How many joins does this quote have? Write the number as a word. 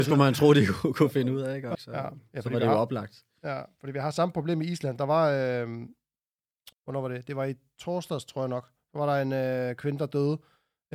two